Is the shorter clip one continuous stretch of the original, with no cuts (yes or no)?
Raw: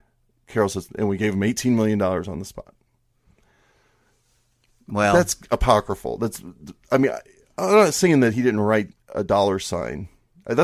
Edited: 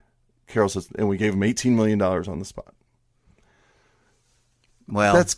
yes